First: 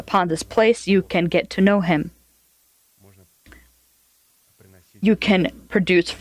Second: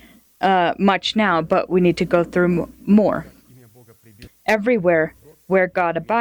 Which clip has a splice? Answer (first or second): second